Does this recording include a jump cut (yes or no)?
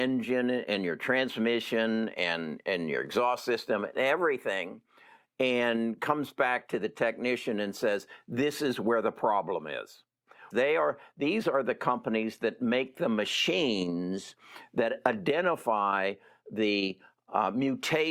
yes